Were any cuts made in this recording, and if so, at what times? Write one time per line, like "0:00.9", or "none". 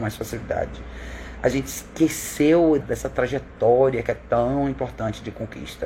0:02.8